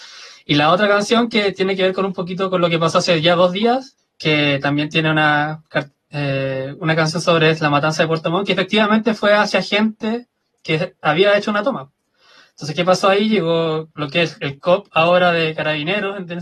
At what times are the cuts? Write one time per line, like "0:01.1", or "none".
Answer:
0:04.0